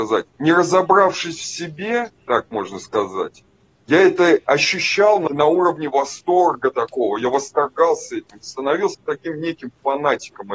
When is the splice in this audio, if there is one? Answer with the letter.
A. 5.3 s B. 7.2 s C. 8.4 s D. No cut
A